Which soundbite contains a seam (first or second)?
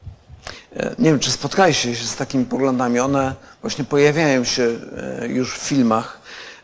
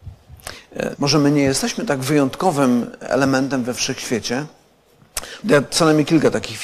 second